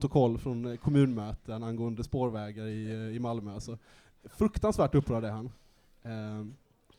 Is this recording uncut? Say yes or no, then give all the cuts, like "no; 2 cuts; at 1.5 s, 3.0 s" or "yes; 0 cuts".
yes; 0 cuts